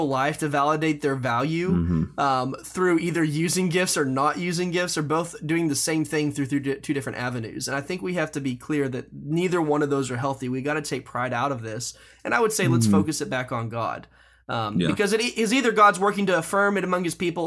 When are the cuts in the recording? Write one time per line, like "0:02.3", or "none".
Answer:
none

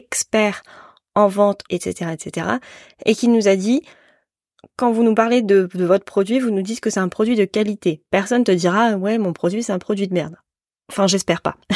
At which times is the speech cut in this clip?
0:01.7

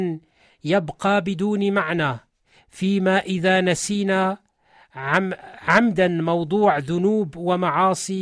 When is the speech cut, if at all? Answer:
none

